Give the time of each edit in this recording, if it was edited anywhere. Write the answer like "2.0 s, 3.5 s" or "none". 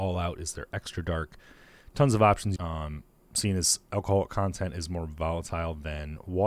2.6 s